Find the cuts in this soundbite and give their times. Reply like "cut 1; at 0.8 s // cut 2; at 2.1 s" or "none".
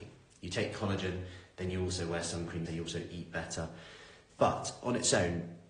cut 1; at 2.7 s // cut 2; at 4.3 s